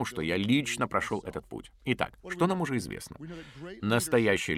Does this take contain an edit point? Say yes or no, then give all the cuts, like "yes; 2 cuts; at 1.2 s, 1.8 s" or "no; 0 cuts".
no; 0 cuts